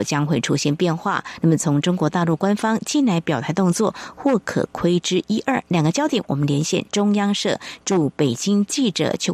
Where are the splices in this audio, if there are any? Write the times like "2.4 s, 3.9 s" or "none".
none